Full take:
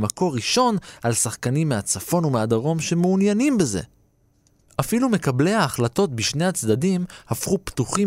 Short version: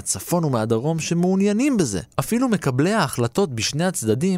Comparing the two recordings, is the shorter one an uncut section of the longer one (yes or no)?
no